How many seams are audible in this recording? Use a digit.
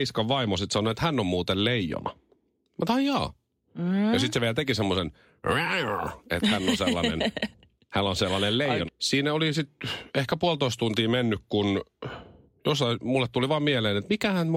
1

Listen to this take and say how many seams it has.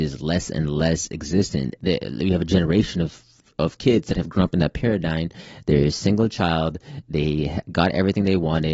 1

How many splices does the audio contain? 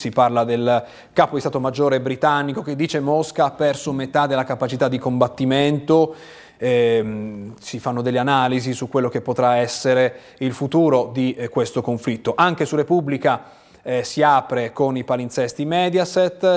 0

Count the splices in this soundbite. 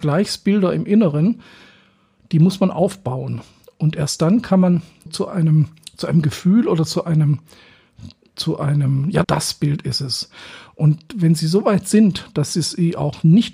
2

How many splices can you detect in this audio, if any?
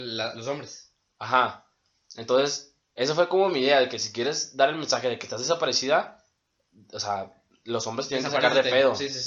0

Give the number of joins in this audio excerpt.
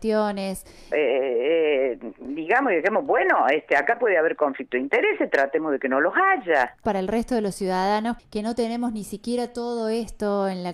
3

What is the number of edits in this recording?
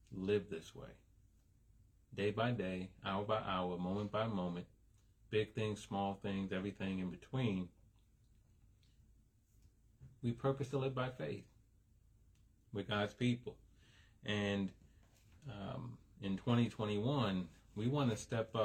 0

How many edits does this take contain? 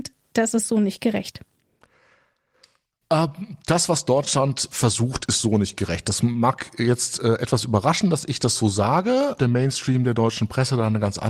1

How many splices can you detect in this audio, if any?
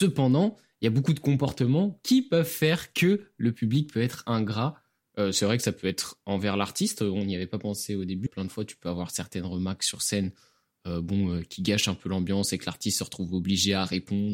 1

